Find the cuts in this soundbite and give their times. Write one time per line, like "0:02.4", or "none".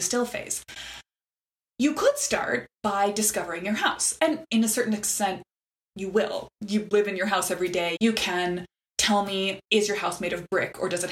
0:08.0
0:09.7